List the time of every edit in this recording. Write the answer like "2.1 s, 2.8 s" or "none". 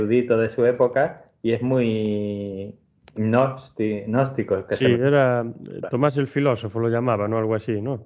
none